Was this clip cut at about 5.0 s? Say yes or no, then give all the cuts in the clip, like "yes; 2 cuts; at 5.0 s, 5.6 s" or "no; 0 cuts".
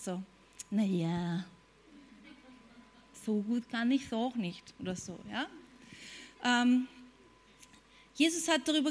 no; 0 cuts